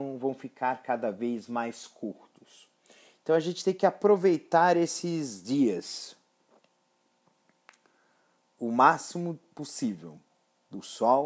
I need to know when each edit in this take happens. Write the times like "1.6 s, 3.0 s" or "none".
none